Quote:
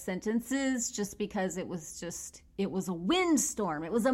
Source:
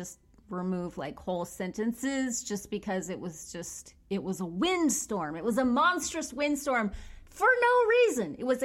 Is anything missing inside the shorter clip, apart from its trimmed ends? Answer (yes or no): no